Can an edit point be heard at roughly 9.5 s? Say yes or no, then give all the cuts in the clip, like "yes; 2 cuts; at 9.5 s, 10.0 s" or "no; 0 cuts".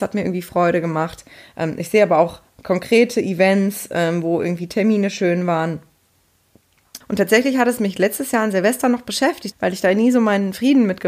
yes; 2 cuts; at 7.0 s, 9.5 s